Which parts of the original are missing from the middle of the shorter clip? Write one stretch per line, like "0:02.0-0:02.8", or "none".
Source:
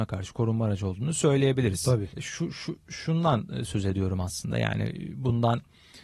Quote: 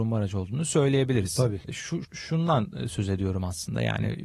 0:02.5-0:02.8